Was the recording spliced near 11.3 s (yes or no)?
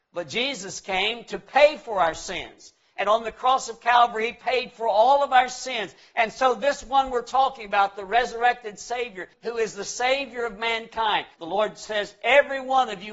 yes